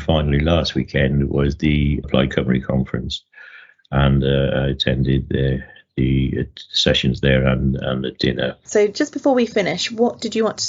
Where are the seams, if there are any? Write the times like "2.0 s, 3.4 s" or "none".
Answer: 2.0 s, 8.7 s

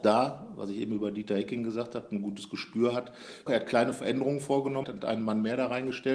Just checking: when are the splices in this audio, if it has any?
3.5 s, 4.8 s

